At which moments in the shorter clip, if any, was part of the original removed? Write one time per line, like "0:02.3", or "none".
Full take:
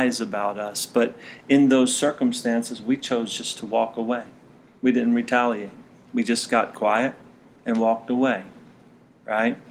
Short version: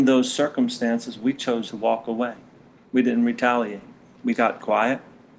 0:01.7
0:04.3